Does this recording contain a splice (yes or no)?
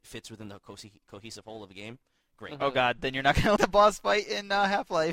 yes